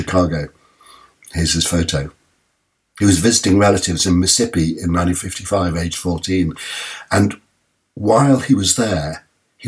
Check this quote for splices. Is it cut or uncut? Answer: uncut